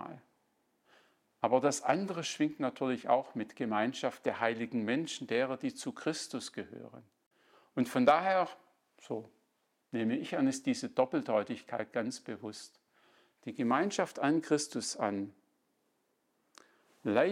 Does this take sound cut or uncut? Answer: uncut